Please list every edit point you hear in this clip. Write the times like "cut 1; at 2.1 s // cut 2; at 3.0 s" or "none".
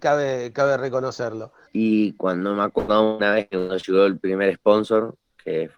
cut 1; at 1.7 s